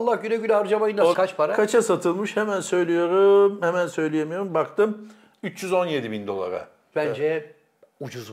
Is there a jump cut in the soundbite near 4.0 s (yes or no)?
no